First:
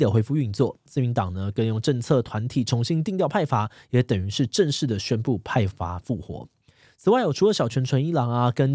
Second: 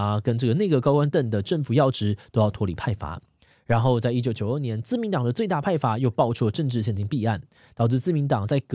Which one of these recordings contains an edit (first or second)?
second